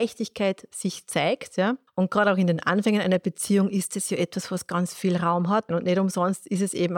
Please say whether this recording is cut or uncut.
cut